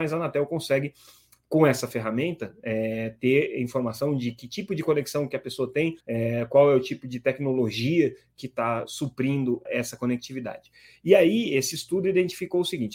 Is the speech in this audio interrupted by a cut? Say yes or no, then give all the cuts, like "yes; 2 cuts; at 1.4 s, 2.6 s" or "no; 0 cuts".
yes; 2 cuts; at 6.0 s, 9.7 s